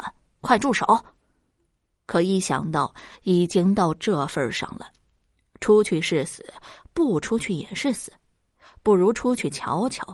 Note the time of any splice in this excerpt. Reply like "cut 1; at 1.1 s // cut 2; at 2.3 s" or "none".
cut 1; at 1.9 s